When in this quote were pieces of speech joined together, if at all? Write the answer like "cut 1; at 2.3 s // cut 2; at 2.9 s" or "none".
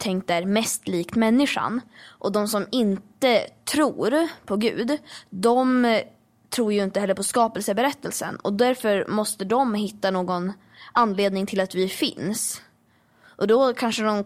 none